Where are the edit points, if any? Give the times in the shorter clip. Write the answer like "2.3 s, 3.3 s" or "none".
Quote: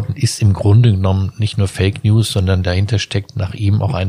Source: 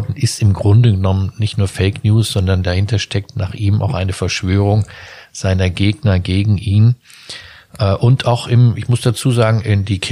none